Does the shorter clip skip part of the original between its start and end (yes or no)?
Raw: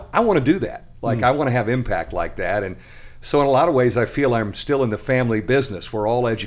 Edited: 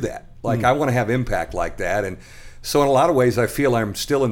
no